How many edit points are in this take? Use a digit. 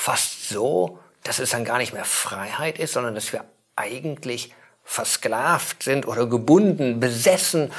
0